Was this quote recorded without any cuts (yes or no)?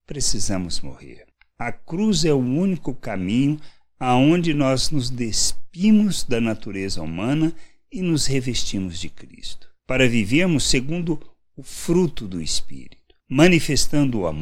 yes